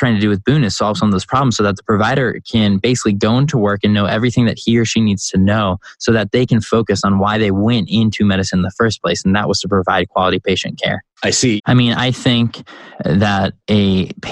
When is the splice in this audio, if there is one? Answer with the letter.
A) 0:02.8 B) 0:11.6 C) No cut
B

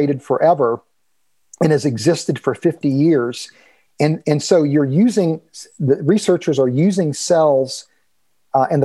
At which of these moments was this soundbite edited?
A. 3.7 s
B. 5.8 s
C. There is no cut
C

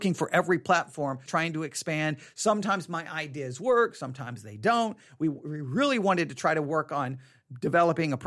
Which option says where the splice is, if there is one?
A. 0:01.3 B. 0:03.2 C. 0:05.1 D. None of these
A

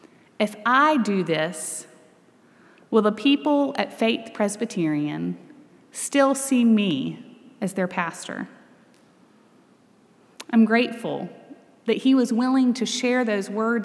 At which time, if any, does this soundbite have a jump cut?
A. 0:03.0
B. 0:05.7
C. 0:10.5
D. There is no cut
D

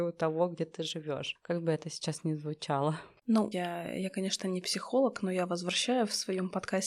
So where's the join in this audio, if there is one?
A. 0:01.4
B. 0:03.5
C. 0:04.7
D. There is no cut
B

